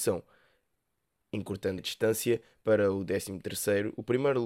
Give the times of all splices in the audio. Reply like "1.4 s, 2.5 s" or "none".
1.8 s